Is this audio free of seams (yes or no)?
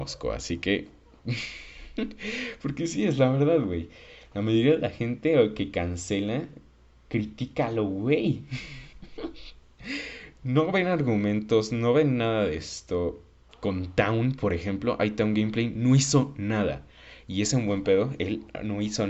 yes